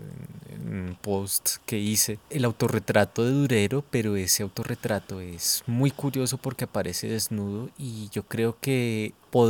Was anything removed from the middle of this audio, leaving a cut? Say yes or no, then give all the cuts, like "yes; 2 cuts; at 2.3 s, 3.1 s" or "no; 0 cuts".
yes; 1 cut; at 2.3 s